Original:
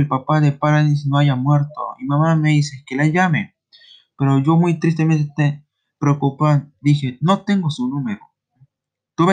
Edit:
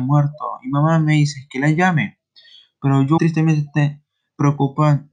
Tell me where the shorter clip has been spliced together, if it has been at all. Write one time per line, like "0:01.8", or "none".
0:03.2